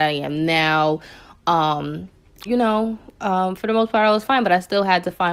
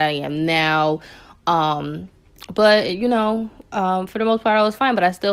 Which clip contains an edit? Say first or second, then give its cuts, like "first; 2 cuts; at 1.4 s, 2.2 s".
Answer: first; 1 cut; at 2.5 s